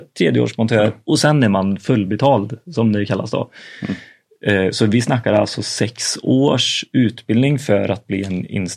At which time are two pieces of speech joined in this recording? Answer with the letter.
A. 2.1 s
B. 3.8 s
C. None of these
B